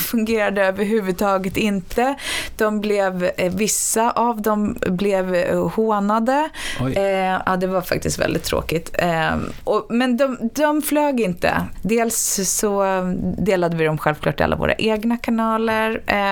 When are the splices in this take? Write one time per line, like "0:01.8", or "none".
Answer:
0:11.7